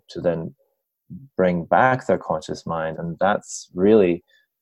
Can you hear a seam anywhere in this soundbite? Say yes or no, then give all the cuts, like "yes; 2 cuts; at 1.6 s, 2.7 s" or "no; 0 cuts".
yes; 1 cut; at 2.9 s